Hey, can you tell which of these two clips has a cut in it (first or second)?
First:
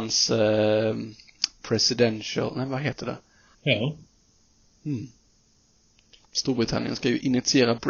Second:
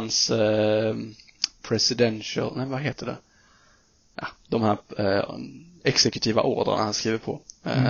first